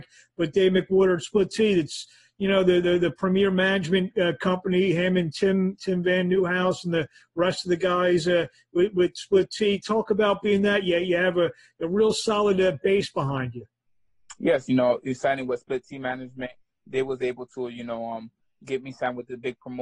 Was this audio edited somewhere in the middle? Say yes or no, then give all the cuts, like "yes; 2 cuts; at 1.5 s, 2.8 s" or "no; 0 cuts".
no; 0 cuts